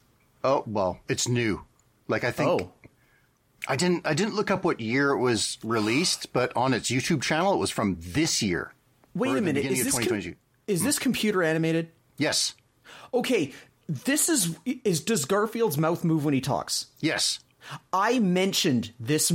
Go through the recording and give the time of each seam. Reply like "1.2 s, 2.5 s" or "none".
none